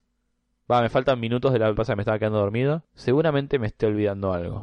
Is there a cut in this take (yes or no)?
yes